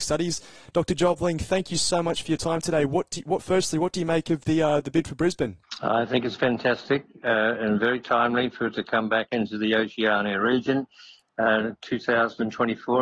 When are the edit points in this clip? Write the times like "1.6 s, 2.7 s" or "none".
none